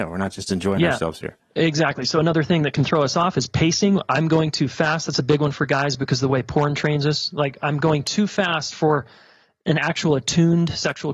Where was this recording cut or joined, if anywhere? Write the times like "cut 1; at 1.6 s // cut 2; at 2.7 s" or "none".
none